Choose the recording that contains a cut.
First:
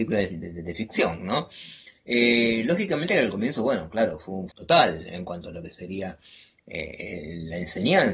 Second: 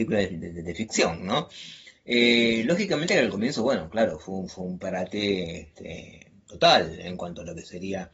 first; 1 cut; at 4.5 s

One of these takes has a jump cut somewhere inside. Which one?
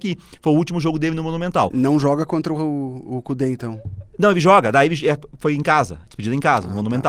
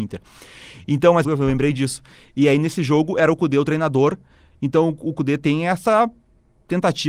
second; 1 cut; at 1.2 s

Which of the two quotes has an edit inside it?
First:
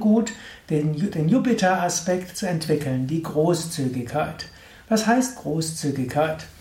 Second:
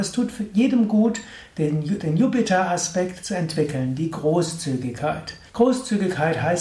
second; 1 cut; at 5.5 s

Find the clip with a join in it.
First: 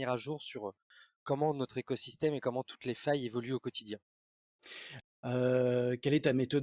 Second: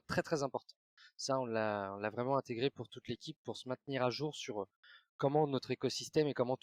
first; 1 cut; at 5.0 s

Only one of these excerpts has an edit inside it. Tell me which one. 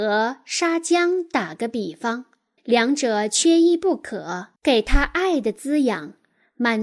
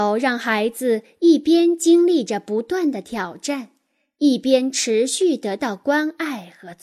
first; 2 cuts; at 2.6 s, 4.6 s

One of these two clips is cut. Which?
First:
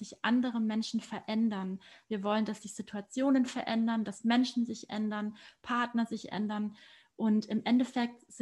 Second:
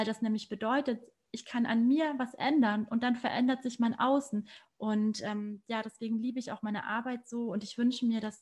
second; 1 cut; at 4.7 s

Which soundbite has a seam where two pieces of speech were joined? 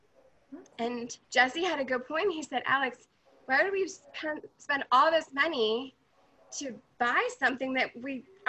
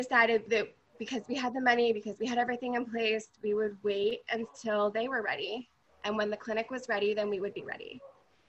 first; 1 cut; at 1.2 s

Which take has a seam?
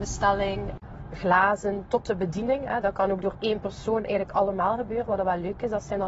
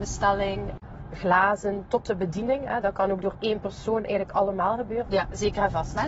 second; 1 cut; at 5.1 s

